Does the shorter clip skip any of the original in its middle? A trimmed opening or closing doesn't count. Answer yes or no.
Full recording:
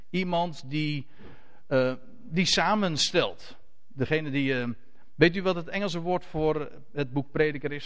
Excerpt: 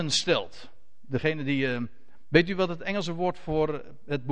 no